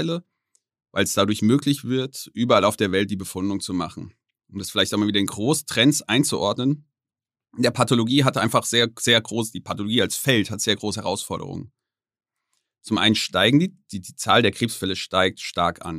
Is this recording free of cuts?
yes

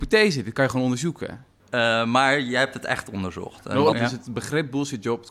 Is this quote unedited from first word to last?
no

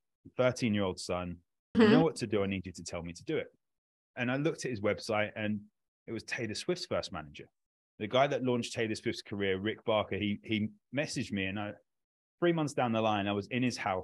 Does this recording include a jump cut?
yes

